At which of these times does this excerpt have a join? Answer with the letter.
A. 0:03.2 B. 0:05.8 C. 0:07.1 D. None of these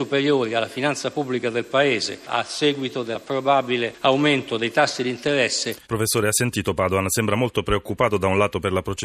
B